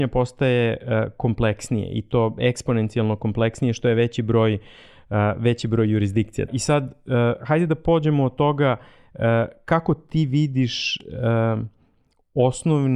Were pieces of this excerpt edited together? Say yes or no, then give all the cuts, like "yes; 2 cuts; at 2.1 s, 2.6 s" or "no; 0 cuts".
yes; 1 cut; at 6.5 s